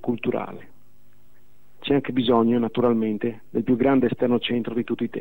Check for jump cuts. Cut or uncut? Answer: uncut